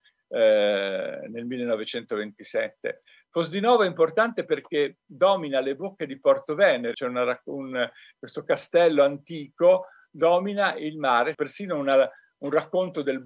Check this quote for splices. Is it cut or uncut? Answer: cut